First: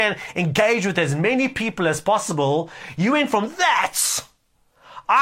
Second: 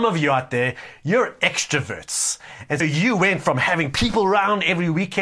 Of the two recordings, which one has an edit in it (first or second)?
second